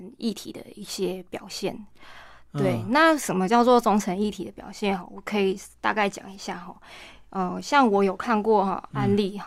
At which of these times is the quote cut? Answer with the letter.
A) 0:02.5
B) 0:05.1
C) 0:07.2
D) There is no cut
D